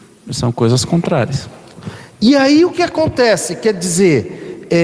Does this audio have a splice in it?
yes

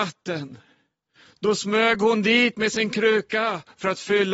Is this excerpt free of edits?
yes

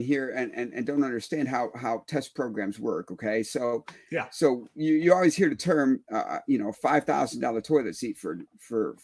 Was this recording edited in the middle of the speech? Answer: no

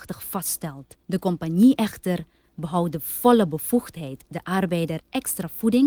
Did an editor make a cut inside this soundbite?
yes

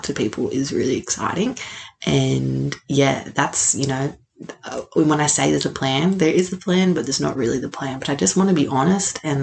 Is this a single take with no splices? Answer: yes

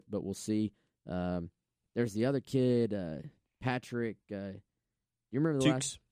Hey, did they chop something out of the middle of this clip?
no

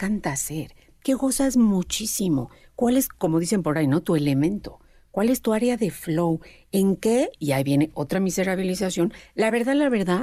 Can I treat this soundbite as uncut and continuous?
yes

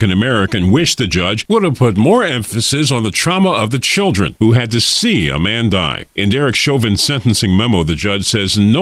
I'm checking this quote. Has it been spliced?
no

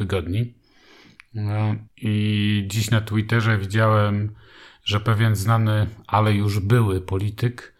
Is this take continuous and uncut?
no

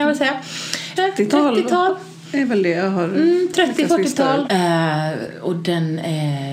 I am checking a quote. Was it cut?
yes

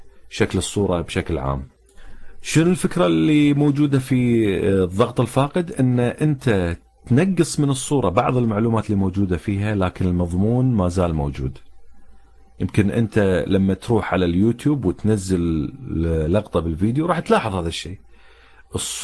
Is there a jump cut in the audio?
no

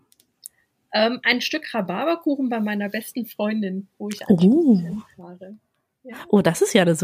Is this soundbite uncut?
yes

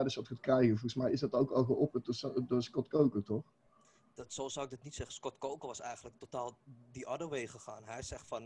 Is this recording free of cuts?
yes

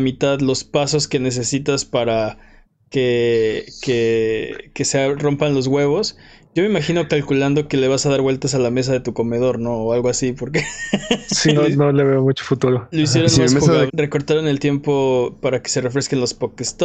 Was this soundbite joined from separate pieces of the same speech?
yes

